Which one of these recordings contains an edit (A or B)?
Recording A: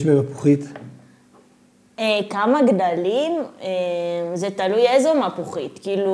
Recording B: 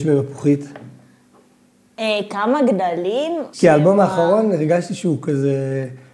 B